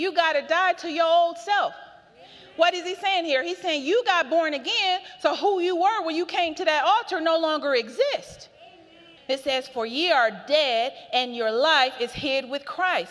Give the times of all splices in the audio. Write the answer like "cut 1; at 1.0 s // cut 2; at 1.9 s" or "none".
cut 1; at 9.2 s